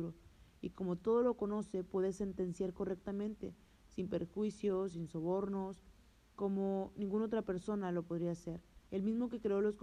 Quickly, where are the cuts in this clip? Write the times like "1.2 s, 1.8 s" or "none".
8.8 s